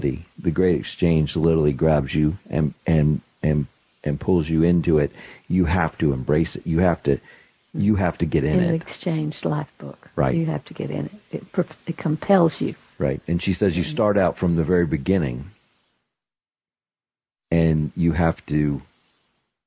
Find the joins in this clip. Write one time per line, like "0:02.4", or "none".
0:07.7